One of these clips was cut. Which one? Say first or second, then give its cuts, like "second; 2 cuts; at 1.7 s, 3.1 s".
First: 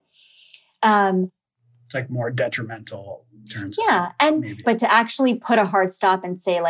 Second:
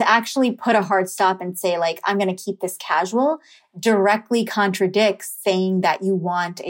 first; 1 cut; at 4.6 s